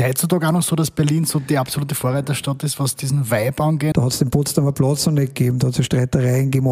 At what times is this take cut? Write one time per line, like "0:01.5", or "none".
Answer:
0:03.9